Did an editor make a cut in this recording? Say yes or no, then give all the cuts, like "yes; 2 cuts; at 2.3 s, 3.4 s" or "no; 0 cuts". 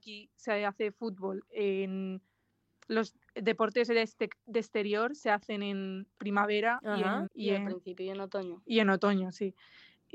yes; 1 cut; at 7.3 s